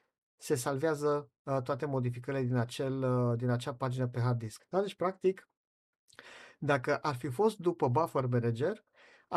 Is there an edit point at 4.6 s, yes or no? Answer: yes